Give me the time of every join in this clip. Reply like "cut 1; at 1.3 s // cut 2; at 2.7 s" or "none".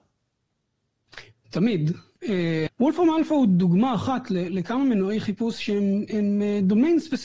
cut 1; at 2.7 s